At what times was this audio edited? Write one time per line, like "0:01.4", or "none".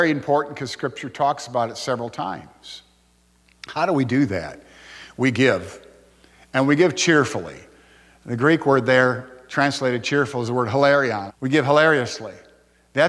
0:11.3

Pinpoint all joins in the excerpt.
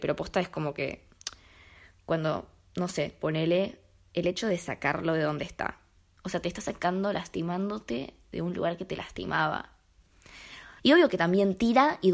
0:03.2
0:06.2
0:10.8

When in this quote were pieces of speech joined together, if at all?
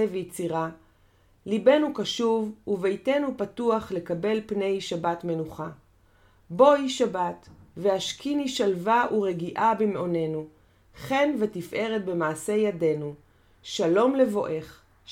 none

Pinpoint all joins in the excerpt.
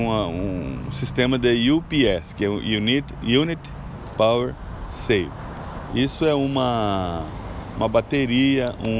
0:05.9

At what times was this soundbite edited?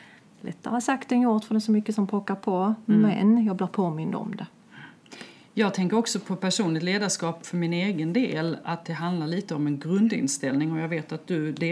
none

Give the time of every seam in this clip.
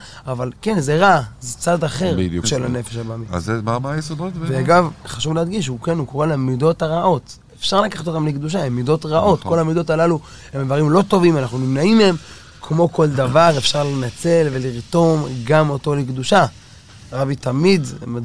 0:02.4

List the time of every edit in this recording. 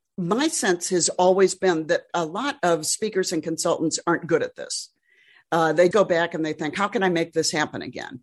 0:05.9

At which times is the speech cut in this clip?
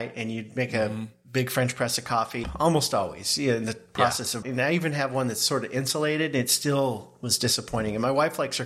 0:02.4
0:04.4

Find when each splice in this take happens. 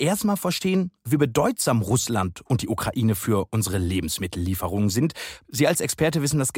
0:05.4

